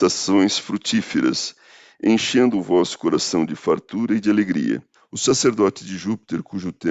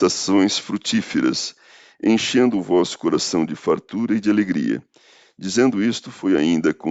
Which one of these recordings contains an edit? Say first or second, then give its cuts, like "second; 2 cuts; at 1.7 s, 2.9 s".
first; 1 cut; at 5.0 s